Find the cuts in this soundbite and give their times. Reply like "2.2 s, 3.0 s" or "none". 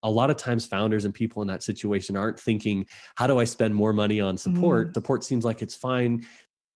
4.9 s